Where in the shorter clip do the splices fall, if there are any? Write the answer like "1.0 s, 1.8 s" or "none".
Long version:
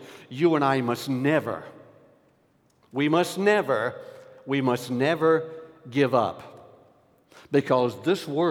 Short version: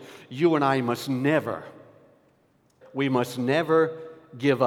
2.8 s